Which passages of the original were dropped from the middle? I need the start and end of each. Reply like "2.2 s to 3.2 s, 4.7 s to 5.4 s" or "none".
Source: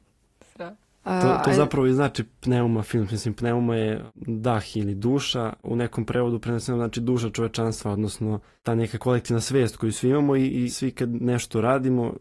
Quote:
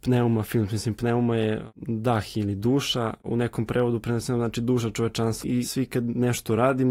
7.8 s to 10.5 s

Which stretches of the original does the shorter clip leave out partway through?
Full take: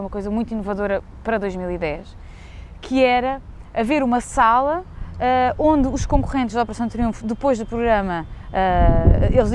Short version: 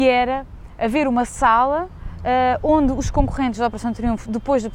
none

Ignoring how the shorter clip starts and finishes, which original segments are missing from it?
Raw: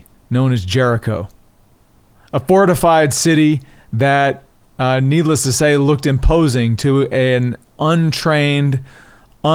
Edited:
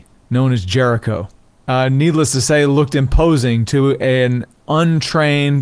1.6 s to 4.7 s

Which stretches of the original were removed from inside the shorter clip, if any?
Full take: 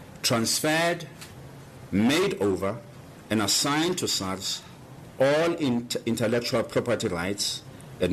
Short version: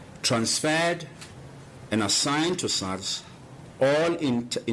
1.9 s to 3.3 s

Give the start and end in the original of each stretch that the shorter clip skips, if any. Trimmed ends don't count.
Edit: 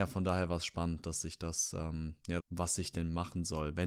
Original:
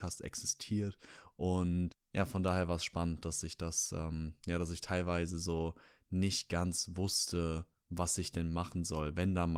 4.6 s to 7.8 s

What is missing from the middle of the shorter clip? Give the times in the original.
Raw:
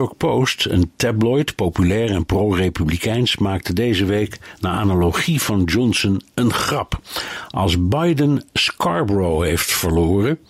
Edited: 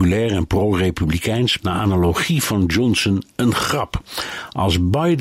3.4 s to 4.6 s

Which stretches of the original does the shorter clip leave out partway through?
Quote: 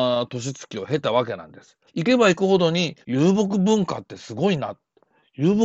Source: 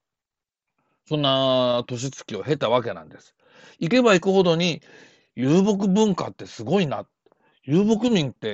3.4 s to 3.7 s, 4.9 s to 5.3 s

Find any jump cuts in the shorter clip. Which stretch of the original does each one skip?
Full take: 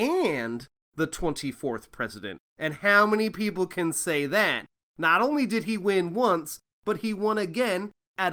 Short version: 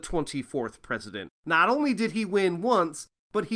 2.4 s to 4.8 s

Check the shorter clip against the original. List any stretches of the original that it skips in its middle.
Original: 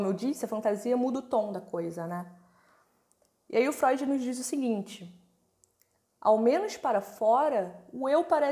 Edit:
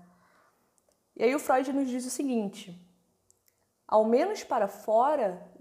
none

